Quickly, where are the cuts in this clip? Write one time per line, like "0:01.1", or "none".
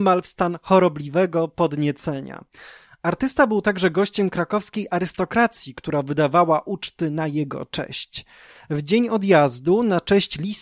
none